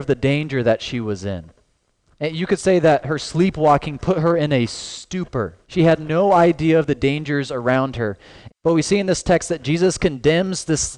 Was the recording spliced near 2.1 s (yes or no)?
no